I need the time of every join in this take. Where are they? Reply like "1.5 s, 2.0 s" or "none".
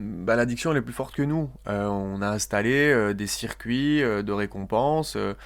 none